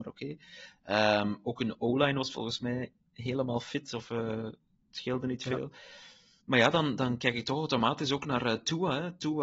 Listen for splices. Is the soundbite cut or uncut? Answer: uncut